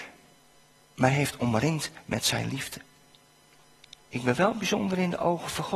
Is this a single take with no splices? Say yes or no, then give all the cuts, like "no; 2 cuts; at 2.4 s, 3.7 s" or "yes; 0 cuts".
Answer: no; 1 cut; at 4.0 s